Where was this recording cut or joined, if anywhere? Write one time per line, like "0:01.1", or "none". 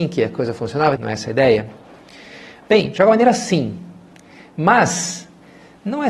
0:01.0